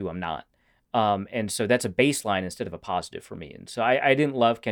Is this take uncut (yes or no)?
yes